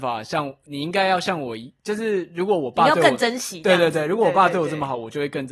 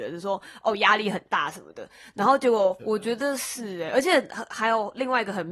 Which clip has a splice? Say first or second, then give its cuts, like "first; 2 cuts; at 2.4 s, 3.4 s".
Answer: second; 1 cut; at 2.8 s